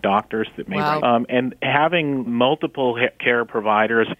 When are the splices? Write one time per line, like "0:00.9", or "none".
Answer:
0:01.0
0:02.3